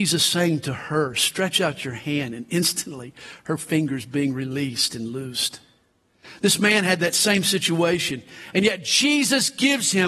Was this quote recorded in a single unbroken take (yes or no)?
yes